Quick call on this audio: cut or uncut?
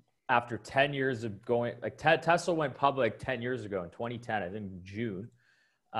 uncut